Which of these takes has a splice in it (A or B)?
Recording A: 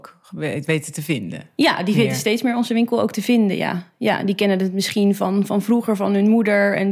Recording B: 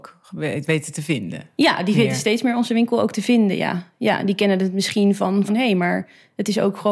B